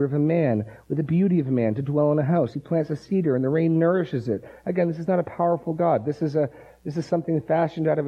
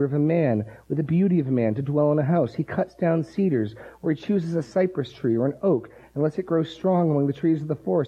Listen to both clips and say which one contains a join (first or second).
first